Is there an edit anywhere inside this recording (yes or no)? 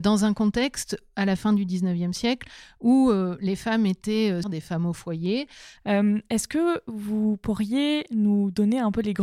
yes